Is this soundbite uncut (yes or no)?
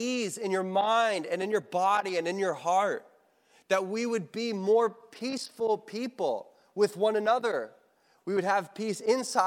yes